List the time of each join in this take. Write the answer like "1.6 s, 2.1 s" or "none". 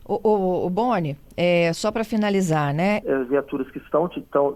3.0 s